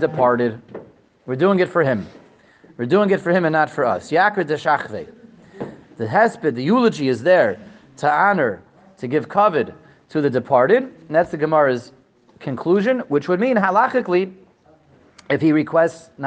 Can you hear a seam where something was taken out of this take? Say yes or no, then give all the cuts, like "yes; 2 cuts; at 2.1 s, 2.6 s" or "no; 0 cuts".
no; 0 cuts